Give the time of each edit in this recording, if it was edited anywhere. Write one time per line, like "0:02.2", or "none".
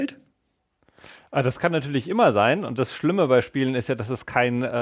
none